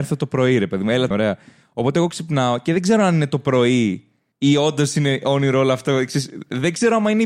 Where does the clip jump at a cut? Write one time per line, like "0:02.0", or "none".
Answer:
0:01.1